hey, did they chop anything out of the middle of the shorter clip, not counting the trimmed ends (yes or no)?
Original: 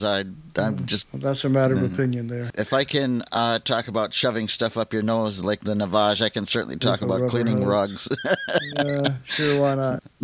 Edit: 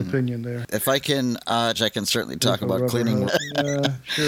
yes